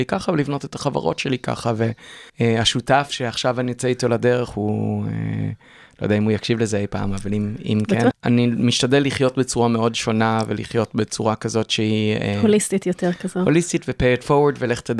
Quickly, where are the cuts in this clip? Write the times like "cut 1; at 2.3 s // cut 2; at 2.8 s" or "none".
cut 1; at 2.3 s // cut 2; at 8.1 s